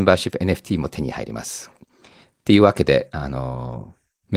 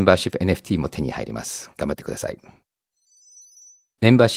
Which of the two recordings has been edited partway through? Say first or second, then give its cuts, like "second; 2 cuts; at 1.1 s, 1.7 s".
first; 1 cut; at 1.7 s